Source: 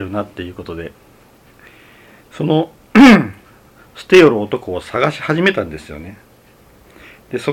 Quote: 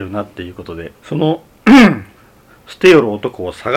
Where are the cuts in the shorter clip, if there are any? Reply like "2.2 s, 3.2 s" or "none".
1.0 s